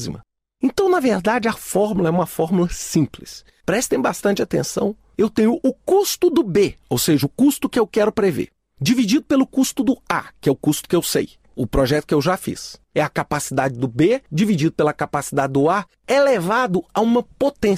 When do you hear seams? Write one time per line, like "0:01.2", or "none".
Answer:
none